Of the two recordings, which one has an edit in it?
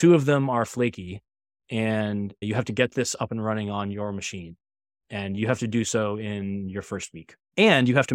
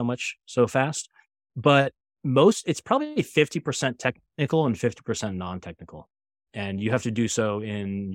second; 1 cut; at 6.5 s

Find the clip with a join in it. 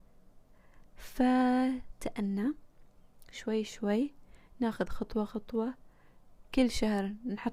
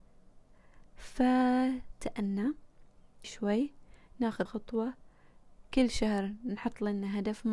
second; 2 cuts; at 3.2 s, 4.5 s

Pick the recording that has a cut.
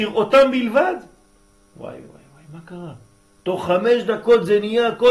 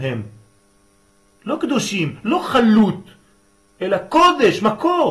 first; 1 cut; at 2.0 s

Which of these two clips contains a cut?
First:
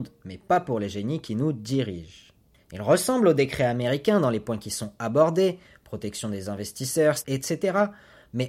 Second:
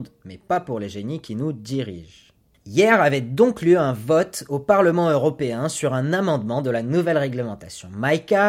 first; 2 cuts; at 2.6 s, 7.2 s

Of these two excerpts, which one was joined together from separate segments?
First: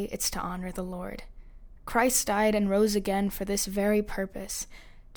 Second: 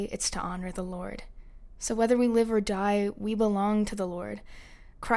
first; 1 cut; at 1.8 s

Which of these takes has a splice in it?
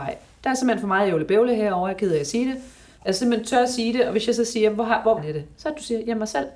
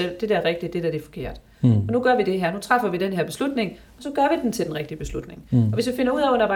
first; 2 cuts; at 2.9 s, 5.2 s

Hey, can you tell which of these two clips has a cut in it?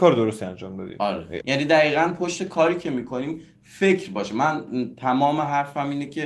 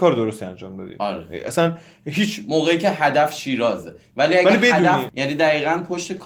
first; 1 cut; at 1.4 s

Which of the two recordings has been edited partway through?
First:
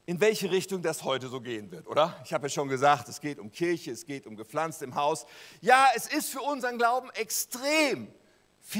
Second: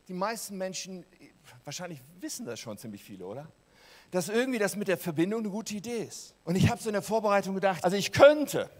second; 2 cuts; at 6.4 s, 7.8 s

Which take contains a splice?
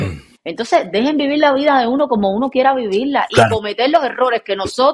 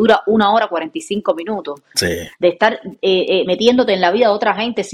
second; 2 cuts; at 1.9 s, 3.5 s

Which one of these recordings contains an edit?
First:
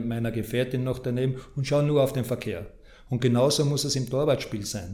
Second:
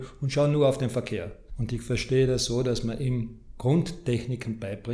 second; 1 cut; at 1.5 s

